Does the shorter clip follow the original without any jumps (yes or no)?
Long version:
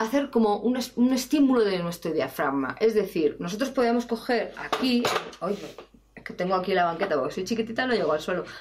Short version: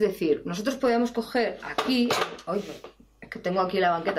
yes